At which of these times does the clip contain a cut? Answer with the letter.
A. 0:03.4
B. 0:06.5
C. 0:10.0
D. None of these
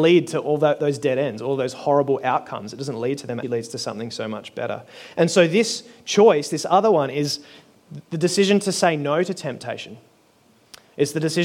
A